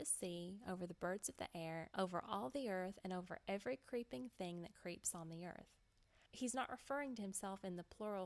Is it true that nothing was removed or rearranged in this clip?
no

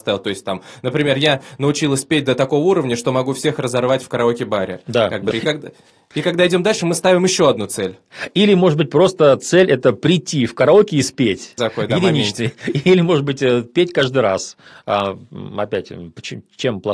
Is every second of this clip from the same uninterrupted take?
no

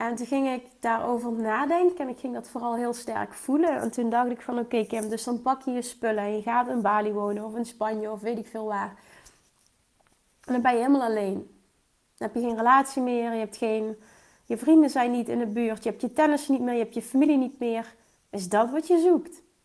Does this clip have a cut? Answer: yes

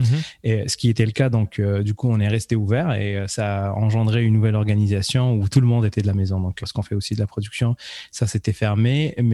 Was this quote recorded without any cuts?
no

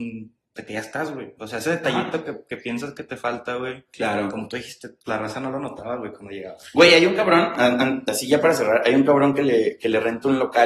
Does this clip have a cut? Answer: no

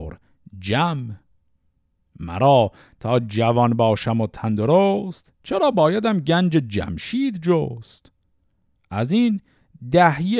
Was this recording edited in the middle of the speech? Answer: no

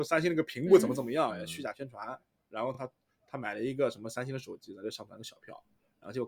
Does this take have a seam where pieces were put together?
no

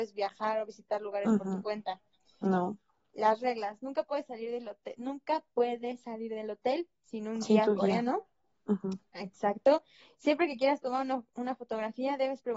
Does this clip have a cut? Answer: no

